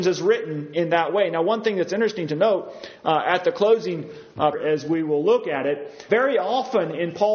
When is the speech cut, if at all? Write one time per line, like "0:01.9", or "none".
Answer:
0:04.5
0:06.1